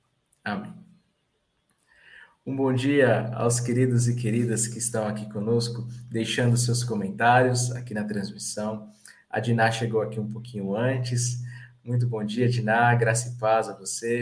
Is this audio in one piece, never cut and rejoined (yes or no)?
yes